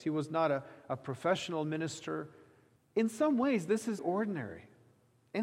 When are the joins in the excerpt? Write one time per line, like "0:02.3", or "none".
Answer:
0:02.8
0:04.0